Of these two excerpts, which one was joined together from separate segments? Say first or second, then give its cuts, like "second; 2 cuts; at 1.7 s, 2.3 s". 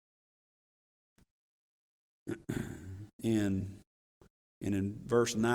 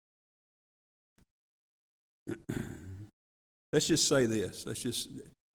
first; 1 cut; at 3.1 s